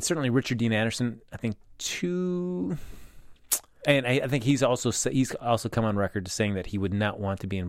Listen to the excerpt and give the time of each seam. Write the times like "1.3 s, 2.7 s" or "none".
3.8 s